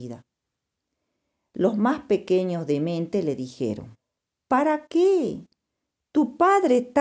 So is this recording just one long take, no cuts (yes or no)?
no